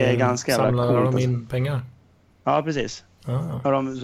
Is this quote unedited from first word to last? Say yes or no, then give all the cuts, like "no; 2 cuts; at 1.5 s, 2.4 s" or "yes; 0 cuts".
yes; 0 cuts